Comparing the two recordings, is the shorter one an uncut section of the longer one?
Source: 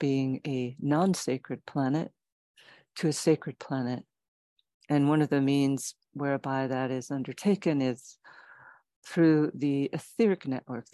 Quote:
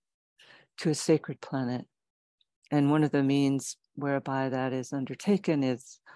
yes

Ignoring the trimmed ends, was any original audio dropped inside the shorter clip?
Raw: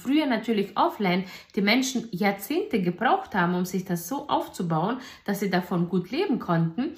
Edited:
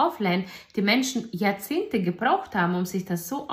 no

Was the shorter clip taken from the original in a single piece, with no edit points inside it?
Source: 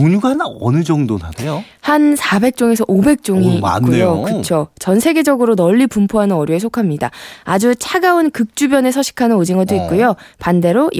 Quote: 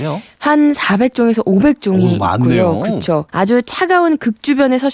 no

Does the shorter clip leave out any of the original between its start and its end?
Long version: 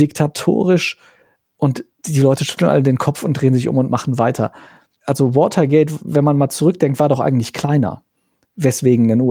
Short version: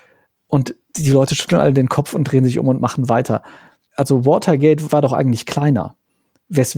yes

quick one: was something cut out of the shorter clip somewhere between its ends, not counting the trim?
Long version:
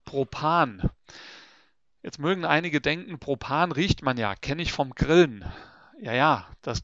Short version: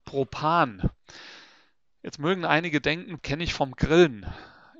yes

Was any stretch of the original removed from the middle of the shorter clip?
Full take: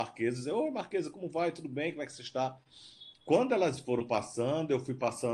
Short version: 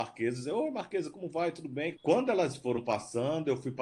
yes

